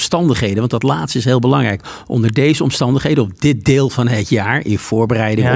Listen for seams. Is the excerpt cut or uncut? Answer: uncut